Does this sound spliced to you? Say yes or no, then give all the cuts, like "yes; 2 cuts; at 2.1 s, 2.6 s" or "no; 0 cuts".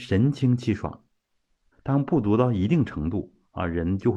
yes; 1 cut; at 1.7 s